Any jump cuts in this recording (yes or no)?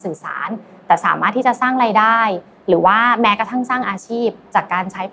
no